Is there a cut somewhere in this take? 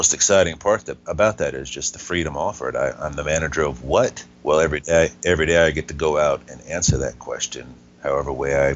no; 0 cuts

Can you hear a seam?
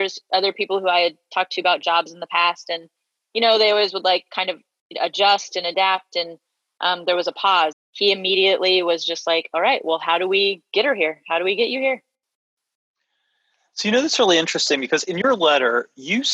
yes; 1 cut; at 7.7 s

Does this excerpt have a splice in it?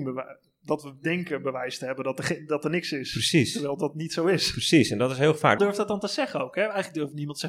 yes; 1 cut; at 5.6 s

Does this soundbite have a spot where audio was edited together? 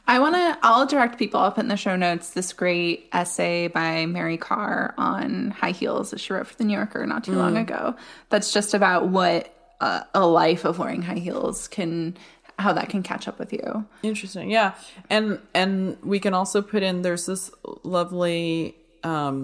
no; 0 cuts

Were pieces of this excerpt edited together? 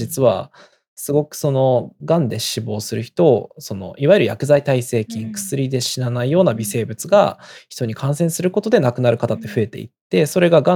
no; 0 cuts

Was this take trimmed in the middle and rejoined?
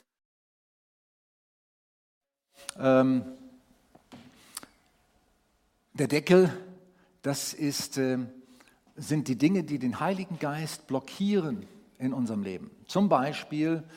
no; 0 cuts

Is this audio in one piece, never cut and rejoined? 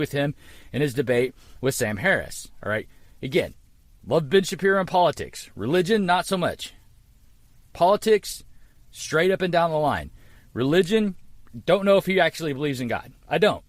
yes; 0 cuts

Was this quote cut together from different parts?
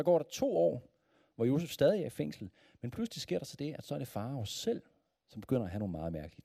no; 0 cuts

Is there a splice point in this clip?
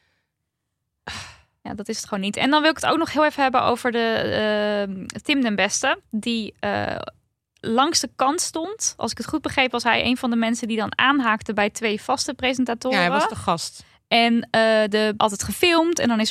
yes; 1 cut; at 15.2 s

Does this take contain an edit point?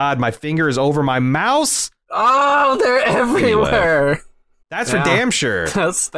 yes; 2 cuts; at 2.0 s, 4.6 s

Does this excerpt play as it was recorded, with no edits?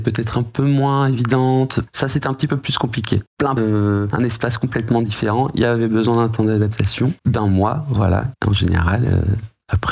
no; 1 cut; at 3.6 s

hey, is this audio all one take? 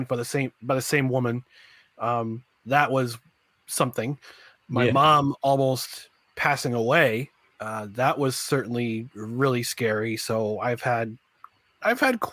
yes; 0 cuts

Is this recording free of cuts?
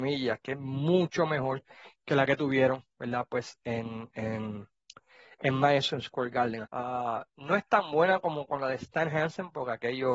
no; 1 cut; at 6.6 s

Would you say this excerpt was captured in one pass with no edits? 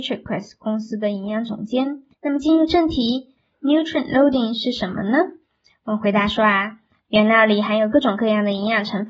no; 2 cuts; at 2.1 s, 7.0 s

